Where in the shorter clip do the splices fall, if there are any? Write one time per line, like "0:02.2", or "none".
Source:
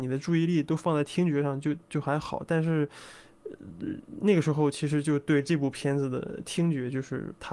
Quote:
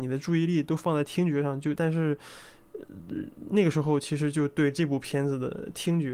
0:01.8